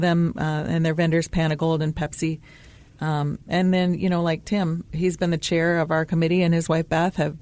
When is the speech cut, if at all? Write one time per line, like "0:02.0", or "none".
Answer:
none